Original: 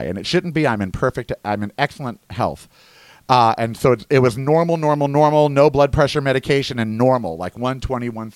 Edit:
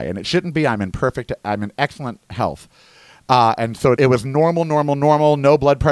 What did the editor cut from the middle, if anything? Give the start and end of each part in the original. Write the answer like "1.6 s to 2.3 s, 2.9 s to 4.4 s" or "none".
4.0 s to 4.1 s